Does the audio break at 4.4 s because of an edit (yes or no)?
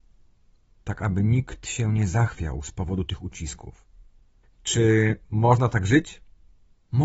yes